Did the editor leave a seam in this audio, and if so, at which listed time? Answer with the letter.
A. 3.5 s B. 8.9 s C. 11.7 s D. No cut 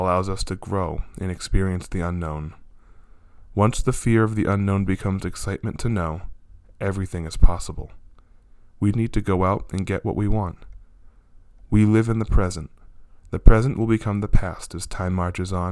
B